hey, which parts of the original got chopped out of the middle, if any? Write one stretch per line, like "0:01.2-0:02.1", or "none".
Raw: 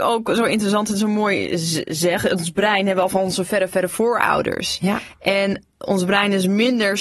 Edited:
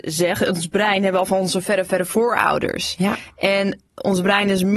none